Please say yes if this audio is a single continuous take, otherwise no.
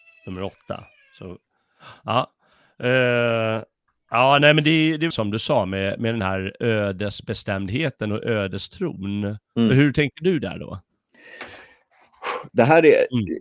no